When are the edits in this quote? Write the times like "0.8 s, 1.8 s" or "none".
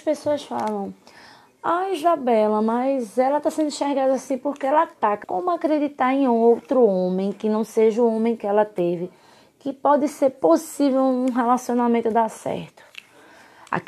5.2 s